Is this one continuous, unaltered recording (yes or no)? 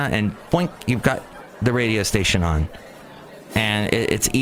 yes